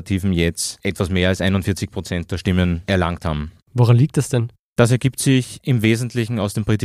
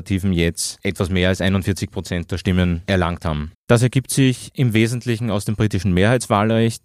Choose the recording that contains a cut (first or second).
second